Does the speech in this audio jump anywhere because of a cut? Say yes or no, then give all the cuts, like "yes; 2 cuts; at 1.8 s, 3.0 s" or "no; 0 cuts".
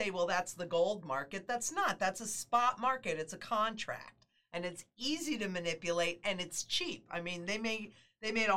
no; 0 cuts